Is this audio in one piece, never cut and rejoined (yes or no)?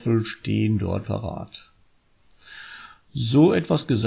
no